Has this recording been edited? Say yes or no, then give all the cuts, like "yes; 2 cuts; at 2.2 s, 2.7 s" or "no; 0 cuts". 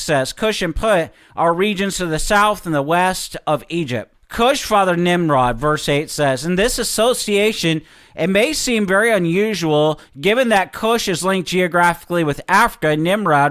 no; 0 cuts